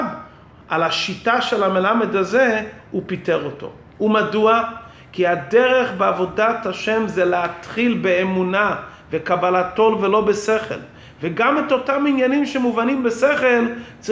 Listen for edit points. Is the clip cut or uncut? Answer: uncut